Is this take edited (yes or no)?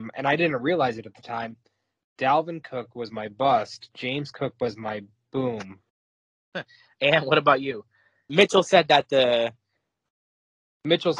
yes